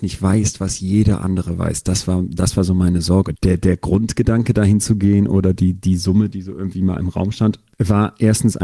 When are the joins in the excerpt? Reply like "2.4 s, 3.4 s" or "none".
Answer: 3.3 s